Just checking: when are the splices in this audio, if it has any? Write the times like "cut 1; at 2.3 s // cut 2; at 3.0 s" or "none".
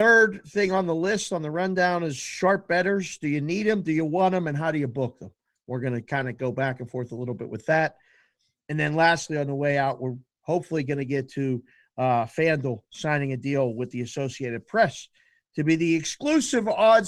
none